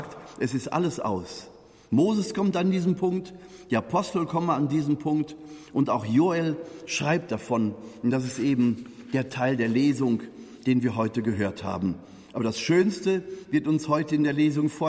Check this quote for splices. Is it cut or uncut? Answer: uncut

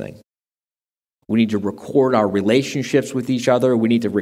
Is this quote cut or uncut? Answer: cut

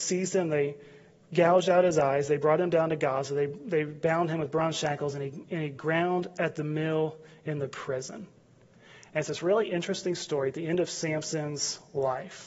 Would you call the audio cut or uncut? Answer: uncut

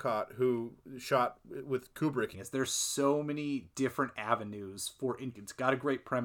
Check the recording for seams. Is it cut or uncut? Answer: cut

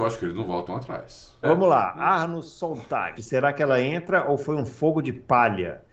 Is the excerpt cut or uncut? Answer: cut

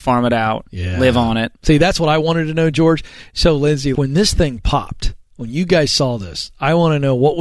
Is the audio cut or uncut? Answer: cut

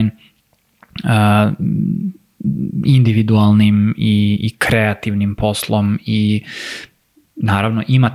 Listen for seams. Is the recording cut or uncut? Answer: uncut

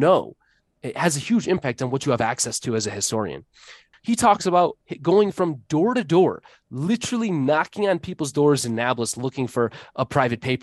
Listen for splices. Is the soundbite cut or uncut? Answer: cut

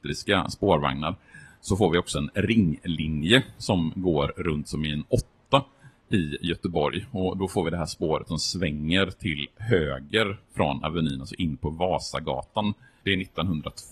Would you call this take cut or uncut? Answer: cut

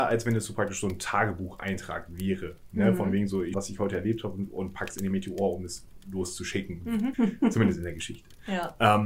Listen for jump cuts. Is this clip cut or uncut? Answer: cut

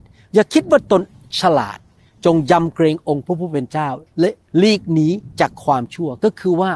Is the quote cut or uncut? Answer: uncut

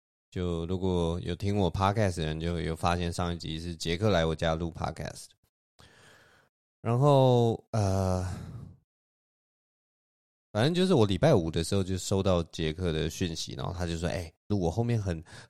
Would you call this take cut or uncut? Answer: cut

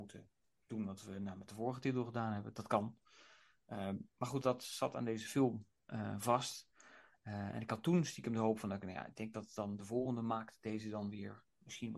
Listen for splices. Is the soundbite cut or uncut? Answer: cut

